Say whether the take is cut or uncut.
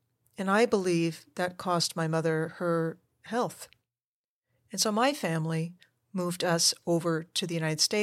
cut